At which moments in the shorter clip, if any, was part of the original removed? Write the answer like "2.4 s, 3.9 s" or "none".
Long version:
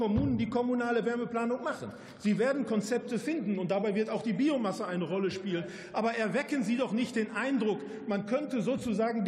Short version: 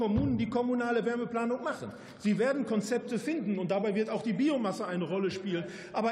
none